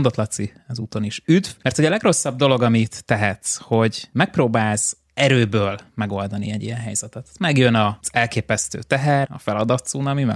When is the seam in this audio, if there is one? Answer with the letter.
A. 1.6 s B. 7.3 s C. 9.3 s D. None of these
C